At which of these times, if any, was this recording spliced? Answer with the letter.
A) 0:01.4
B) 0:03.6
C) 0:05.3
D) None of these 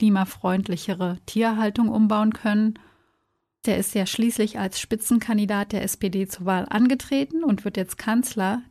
B